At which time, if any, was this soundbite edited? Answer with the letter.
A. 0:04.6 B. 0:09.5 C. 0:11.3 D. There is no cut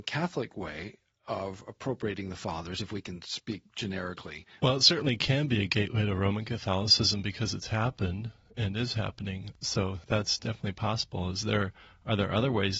A